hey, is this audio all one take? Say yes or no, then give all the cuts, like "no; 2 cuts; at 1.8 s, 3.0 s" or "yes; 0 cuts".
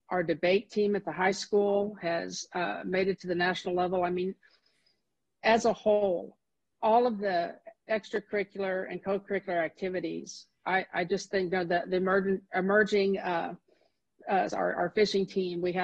no; 1 cut; at 14.5 s